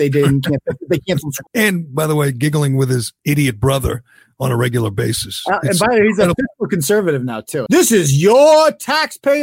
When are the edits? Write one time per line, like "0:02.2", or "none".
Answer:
0:01.5
0:07.7